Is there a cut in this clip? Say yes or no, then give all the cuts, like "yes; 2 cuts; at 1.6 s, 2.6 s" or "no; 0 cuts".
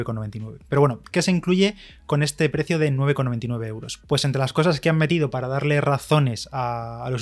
no; 0 cuts